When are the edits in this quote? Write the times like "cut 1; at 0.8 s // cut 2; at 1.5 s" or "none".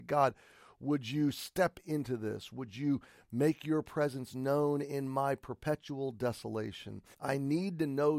cut 1; at 7.1 s